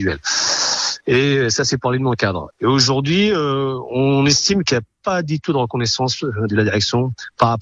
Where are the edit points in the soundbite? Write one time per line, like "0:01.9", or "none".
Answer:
0:02.5